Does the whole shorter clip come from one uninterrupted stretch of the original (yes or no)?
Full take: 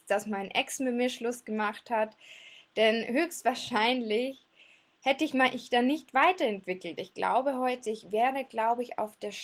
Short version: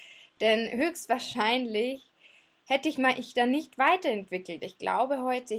yes